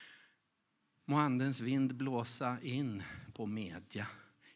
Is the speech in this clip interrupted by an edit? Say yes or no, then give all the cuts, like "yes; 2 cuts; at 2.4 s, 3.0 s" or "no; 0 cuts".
no; 0 cuts